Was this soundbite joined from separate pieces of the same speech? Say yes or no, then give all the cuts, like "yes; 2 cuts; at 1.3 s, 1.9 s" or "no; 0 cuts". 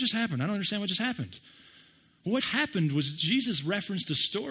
yes; 1 cut; at 2.4 s